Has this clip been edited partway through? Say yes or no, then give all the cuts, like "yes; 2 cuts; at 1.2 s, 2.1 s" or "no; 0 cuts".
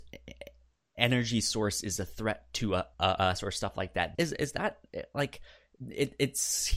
yes; 2 cuts; at 2.9 s, 4.1 s